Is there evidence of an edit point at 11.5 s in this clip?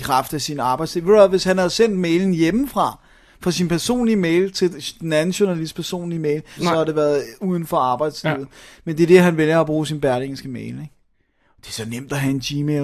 no; 1 cut; at 6.6 s

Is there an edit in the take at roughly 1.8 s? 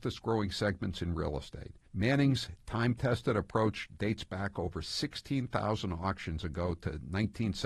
yes; 1 cut; at 1.8 s

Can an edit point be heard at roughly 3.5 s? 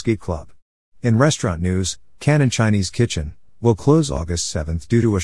yes; 1 cut; at 3.5 s

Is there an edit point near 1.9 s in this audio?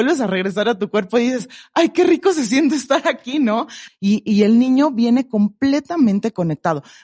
no; 1 cut; at 3.9 s

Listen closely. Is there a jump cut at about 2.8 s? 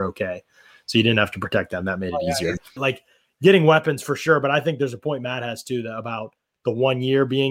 yes; 1 cut; at 2.8 s

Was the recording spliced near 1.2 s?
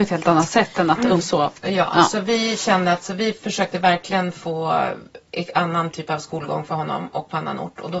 yes; 1 cut; at 1.2 s

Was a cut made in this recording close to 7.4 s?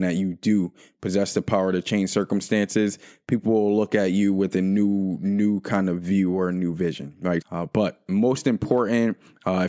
yes; 1 cut; at 7.4 s

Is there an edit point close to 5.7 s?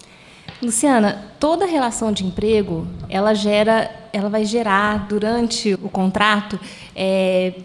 yes; 1 cut; at 5.7 s

